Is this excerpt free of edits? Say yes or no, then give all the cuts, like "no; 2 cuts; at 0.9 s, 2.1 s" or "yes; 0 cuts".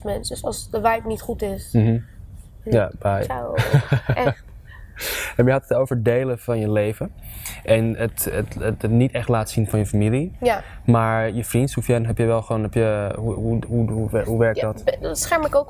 yes; 0 cuts